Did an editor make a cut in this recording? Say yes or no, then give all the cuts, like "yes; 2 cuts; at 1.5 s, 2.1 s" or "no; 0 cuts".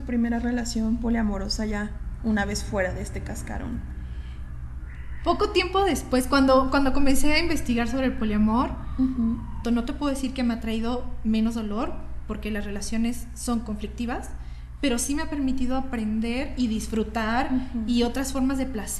yes; 1 cut; at 9.6 s